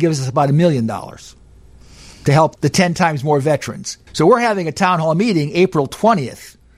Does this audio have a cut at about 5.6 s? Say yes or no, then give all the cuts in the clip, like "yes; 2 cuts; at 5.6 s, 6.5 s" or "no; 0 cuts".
no; 2 cuts; at 2.6 s, 4.1 s